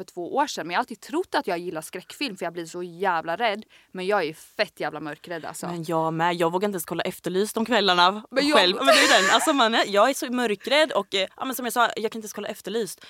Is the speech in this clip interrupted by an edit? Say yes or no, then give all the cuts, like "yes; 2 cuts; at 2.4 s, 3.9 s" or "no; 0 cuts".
yes; 1 cut; at 8.8 s